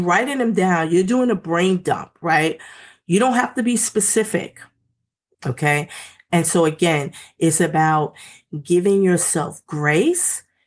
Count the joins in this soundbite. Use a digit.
1